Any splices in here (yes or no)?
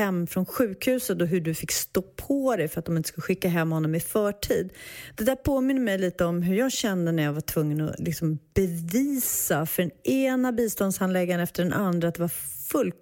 no